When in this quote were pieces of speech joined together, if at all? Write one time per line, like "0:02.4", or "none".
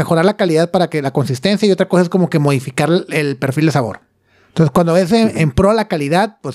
none